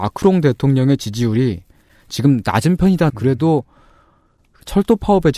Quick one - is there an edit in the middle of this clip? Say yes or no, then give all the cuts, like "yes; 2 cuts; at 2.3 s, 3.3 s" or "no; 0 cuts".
yes; 1 cut; at 3.1 s